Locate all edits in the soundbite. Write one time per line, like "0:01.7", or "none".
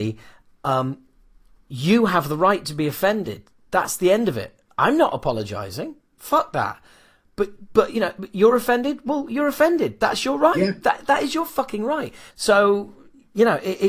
0:10.8
0:12.3